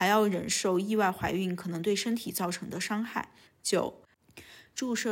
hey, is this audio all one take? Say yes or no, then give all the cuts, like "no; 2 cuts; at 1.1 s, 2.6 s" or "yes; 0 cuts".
no; 1 cut; at 3.5 s